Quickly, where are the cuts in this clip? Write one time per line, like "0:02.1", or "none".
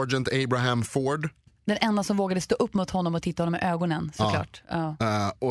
none